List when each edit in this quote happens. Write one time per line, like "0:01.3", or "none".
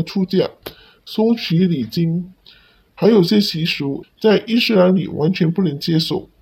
0:02.3
0:04.0